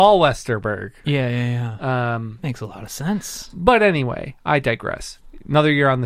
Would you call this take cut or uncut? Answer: cut